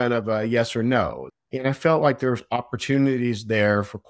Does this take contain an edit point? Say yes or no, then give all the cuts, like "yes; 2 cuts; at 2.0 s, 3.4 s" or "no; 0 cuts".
yes; 1 cut; at 1.3 s